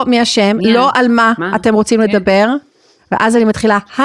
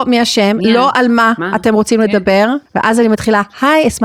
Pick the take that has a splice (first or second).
second